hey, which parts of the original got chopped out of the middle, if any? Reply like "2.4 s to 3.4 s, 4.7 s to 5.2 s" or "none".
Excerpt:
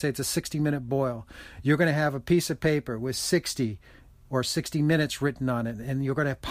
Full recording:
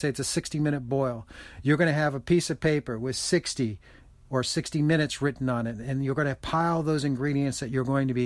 none

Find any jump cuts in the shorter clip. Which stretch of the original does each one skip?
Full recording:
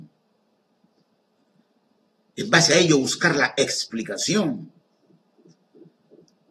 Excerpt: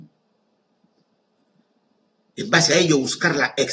none

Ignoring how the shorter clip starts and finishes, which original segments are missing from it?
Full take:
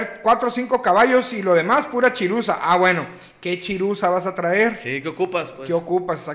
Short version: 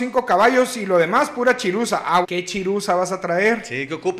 2.8 s to 3.4 s

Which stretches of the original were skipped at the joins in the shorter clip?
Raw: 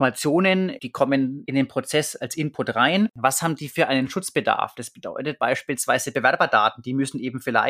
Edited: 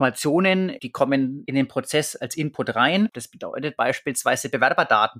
3.1 s to 4.7 s

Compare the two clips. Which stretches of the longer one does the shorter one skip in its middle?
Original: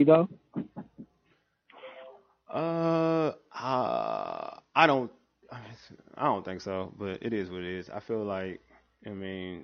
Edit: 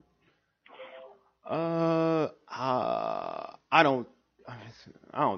none

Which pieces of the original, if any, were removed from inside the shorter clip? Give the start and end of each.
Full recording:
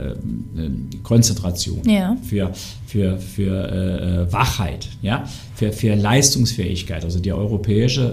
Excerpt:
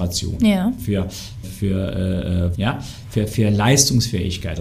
2.9 s to 3.2 s, 4.3 s to 5.0 s

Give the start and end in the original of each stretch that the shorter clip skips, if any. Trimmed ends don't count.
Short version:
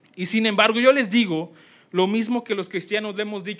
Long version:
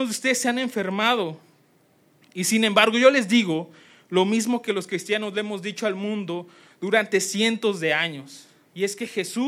none

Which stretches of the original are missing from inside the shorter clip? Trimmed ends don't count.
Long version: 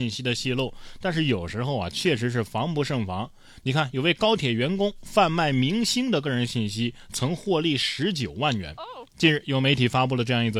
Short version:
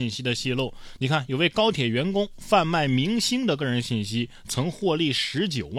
1.0 s to 3.6 s

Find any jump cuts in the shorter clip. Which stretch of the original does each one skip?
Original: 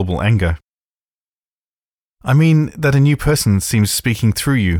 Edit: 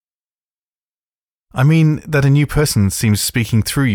none

